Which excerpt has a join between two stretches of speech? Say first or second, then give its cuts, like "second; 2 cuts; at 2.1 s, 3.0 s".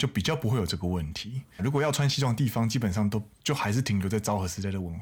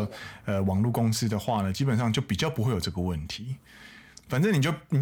first; 1 cut; at 1.6 s